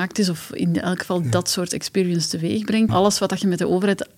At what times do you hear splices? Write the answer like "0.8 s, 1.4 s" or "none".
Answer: 2.9 s